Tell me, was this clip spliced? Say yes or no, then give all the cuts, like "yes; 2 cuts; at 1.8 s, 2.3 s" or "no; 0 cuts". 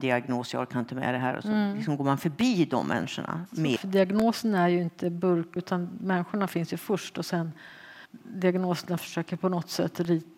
yes; 3 cuts; at 3.8 s, 5.6 s, 8.1 s